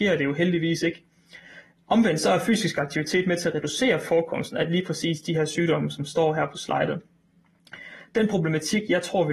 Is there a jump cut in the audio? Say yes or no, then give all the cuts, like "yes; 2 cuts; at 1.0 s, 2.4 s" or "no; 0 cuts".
yes; 1 cut; at 1.7 s